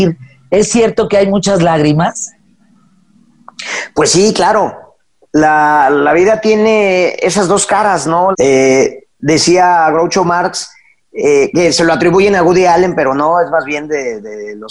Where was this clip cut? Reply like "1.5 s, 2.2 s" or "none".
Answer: 8.3 s